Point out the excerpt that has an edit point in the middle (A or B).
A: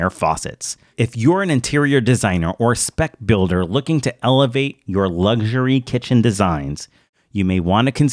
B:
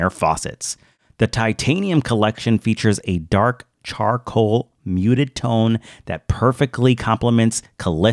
A